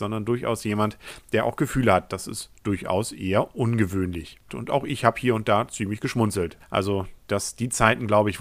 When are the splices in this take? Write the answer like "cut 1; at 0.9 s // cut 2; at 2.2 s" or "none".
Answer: cut 1; at 4.5 s // cut 2; at 6.6 s